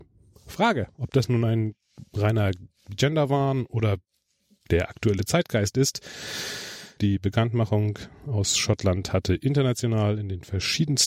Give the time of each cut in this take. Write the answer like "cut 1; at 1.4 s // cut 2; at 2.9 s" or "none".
cut 1; at 7.0 s